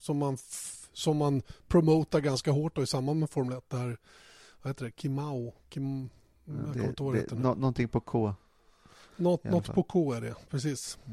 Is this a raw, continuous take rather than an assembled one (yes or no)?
yes